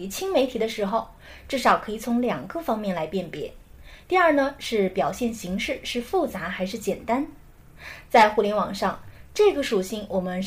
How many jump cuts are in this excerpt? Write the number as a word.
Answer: one